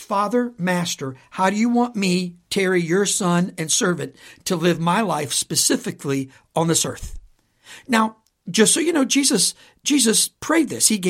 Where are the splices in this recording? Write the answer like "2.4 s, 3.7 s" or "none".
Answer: none